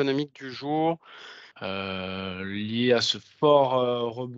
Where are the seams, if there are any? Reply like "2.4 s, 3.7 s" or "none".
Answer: 1.5 s

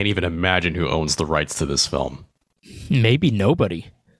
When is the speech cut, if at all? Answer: none

